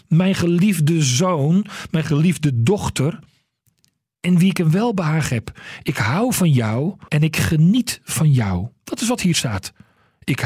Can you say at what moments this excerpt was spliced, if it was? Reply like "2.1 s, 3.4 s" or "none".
7.1 s